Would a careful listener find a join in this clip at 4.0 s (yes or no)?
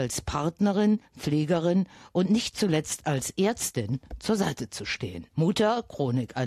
no